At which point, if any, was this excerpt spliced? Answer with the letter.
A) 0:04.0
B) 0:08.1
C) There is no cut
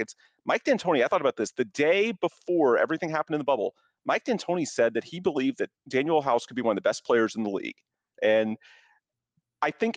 B